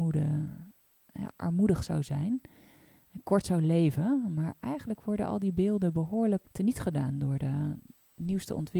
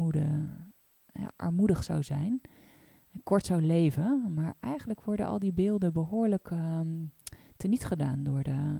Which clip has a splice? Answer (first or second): first